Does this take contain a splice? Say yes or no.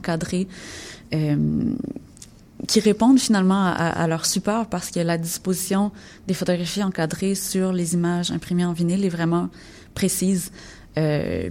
no